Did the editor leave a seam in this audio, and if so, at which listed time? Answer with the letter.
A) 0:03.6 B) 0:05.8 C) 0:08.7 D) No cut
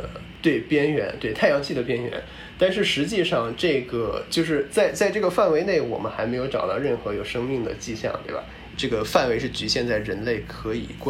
C